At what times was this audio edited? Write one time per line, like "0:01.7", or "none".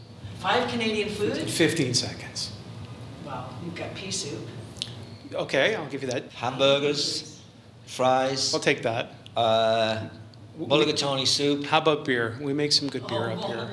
0:06.3